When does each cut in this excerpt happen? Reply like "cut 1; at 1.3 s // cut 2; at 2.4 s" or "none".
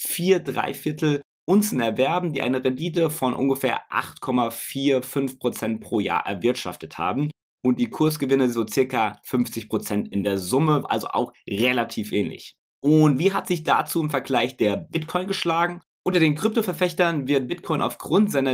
cut 1; at 10.8 s

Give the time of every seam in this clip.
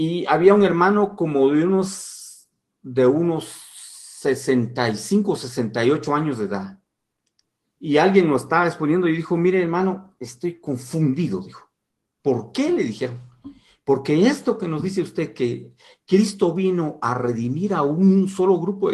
none

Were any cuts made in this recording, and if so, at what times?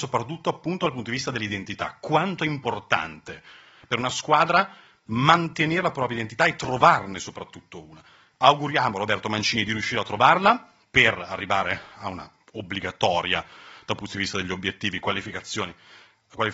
none

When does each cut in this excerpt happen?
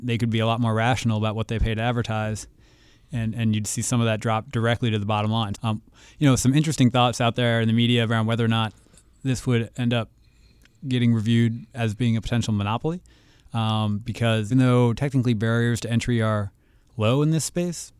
cut 1; at 5.5 s // cut 2; at 14.5 s

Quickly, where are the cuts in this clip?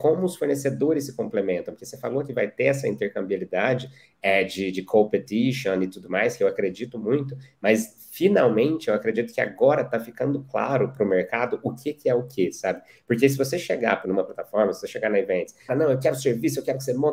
cut 1; at 14.0 s // cut 2; at 15.7 s

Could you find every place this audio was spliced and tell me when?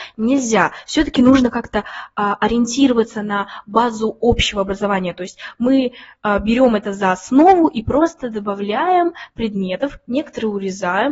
none

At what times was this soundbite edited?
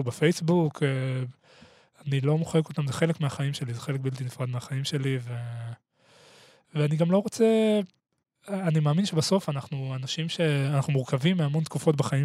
none

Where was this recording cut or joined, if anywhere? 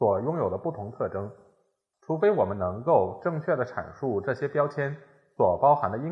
cut 1; at 1.9 s

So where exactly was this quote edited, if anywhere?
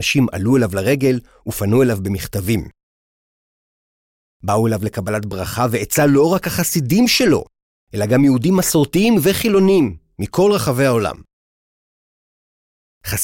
none

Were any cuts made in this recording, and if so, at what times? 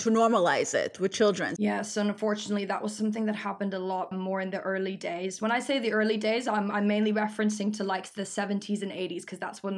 cut 1; at 1.6 s // cut 2; at 4.1 s

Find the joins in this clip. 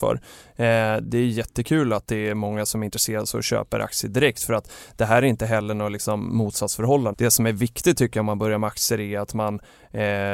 cut 1; at 1.0 s // cut 2; at 7.1 s

